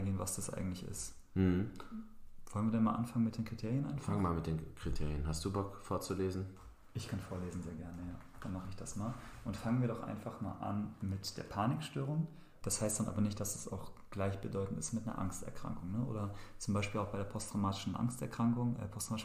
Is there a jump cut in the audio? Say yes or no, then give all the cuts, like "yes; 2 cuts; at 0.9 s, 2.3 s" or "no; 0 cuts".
yes; 1 cut; at 12.6 s